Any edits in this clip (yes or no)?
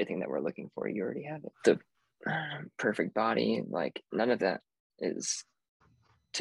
yes